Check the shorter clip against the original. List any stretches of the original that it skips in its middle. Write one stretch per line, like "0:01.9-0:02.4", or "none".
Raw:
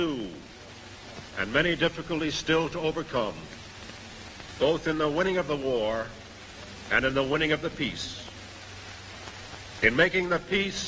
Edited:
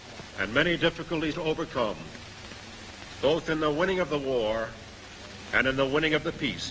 0:02.3-0:02.7